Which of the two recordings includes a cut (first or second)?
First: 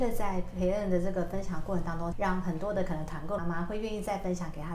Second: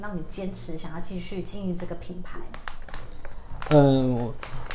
first